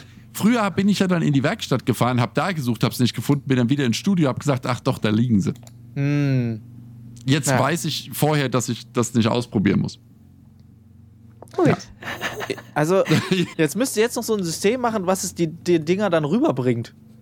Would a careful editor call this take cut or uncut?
cut